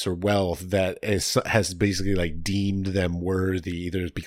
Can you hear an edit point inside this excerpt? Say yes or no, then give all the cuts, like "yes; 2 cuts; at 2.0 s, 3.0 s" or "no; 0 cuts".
no; 0 cuts